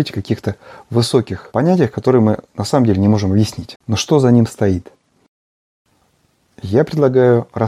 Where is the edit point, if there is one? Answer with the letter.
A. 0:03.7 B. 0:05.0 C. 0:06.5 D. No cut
A